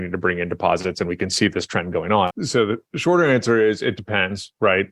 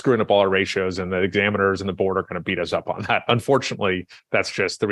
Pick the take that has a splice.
first; 1 cut; at 2.3 s

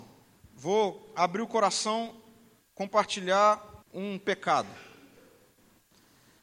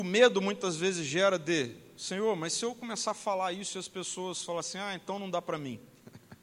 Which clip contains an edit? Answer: first; 1 cut; at 3.8 s

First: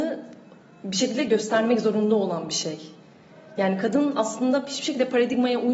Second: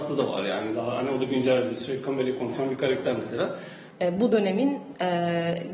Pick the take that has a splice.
second; 1 cut; at 3.9 s

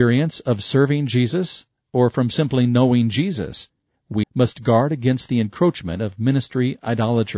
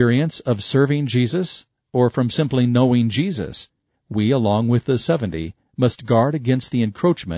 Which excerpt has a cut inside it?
first; 1 cut; at 4.2 s

